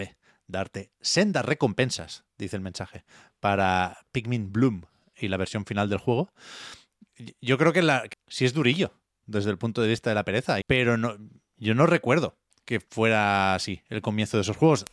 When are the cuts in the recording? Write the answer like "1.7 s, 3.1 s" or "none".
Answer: 8.1 s, 10.6 s